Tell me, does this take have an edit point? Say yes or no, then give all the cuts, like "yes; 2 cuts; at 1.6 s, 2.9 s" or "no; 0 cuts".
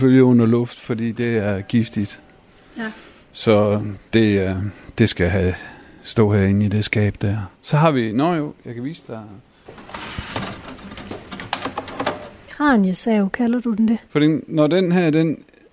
yes; 3 cuts; at 7.5 s, 12.5 s, 14.1 s